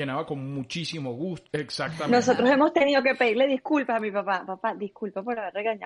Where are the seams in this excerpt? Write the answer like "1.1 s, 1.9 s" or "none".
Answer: 1.5 s